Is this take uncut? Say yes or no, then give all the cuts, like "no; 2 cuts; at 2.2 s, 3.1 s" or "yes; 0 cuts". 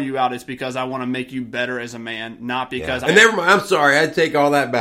no; 1 cut; at 3.0 s